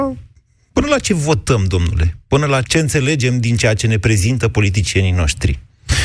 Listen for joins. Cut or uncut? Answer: cut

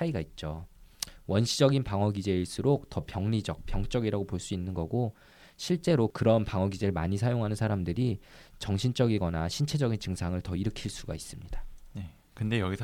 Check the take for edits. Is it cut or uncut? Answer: uncut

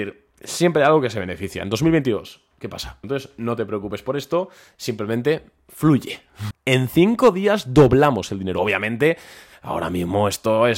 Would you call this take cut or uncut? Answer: cut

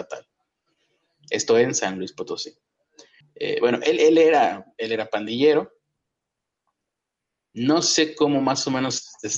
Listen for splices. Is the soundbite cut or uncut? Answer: cut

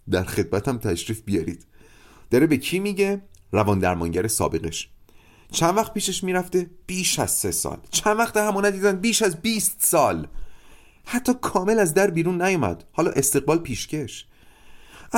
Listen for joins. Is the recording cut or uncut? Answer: uncut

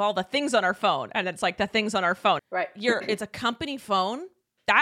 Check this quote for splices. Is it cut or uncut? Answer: cut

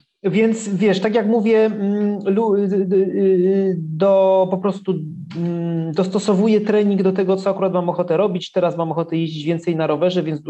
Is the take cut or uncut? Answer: uncut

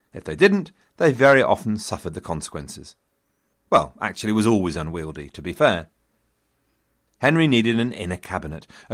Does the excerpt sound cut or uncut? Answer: cut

